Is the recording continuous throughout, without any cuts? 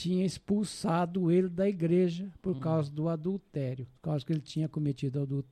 no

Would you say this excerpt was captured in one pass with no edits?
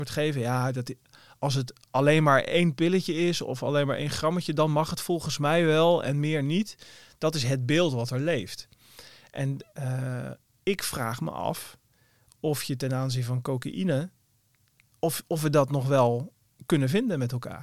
yes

